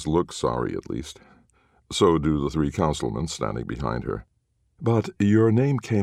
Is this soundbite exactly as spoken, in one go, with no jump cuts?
yes; 0 cuts

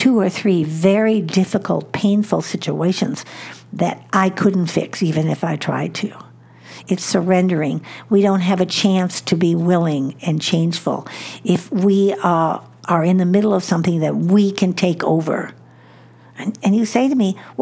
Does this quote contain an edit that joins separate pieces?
yes; 1 cut; at 6.8 s

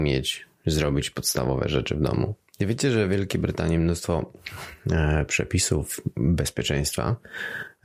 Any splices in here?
yes; 1 cut; at 2.4 s

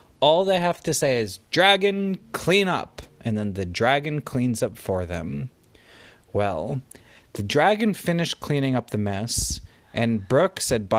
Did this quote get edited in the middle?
no; 0 cuts

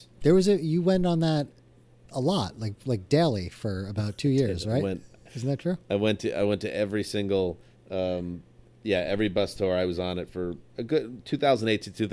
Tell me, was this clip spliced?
no; 0 cuts

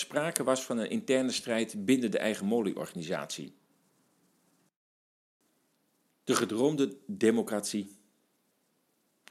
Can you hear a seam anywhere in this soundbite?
no; 0 cuts

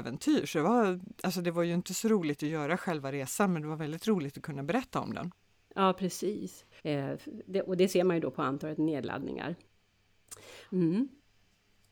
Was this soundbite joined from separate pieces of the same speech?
yes; 2 cuts; at 6.8 s, 10.7 s

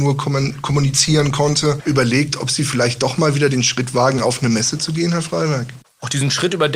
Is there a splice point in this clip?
no; 0 cuts

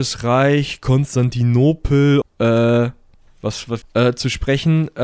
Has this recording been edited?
yes; 2 cuts; at 2.2 s, 3.8 s

